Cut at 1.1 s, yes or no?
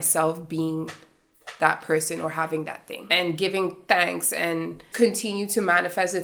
no